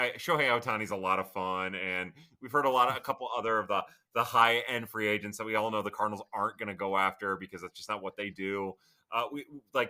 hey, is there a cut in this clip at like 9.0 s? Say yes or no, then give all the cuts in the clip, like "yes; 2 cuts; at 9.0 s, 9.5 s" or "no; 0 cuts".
no; 0 cuts